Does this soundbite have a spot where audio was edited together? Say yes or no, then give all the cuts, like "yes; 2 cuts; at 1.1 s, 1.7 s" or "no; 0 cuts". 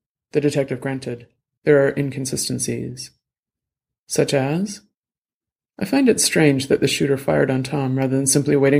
yes; 1 cut; at 1.6 s